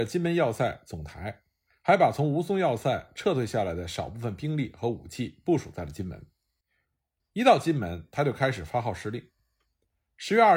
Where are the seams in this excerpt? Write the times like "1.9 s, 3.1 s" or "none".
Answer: 7.2 s